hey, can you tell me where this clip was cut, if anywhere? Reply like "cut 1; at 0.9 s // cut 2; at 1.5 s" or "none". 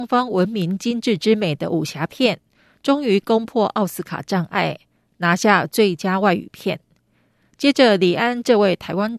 none